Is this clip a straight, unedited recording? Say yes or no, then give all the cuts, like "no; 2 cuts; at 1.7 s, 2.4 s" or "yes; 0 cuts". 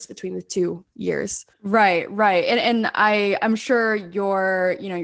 no; 1 cut; at 1.5 s